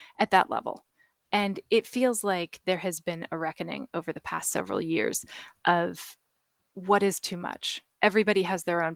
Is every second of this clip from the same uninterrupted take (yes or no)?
no